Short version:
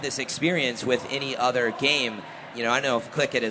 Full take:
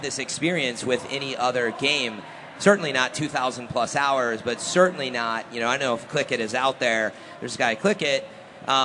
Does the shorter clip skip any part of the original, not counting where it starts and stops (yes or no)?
yes